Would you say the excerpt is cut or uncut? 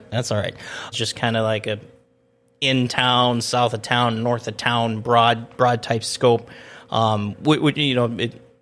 cut